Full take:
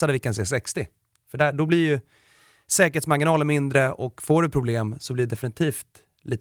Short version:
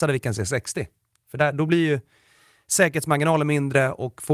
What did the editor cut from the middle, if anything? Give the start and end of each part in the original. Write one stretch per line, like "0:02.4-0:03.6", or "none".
none